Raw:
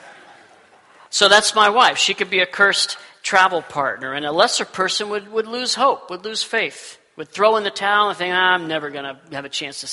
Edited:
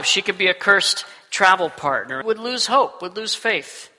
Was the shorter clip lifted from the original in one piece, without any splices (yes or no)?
no